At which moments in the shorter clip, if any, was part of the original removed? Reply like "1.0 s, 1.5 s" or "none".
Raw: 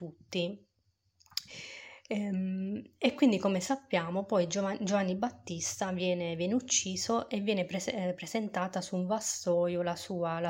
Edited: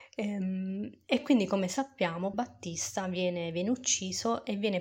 2.3 s